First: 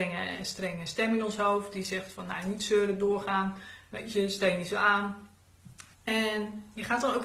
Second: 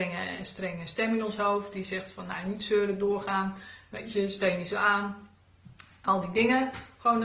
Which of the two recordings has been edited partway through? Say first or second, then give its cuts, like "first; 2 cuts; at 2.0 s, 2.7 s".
first; 1 cut; at 5.9 s